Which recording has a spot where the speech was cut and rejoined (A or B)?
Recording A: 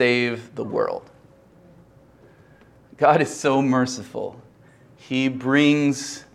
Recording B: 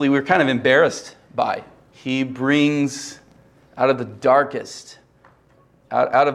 B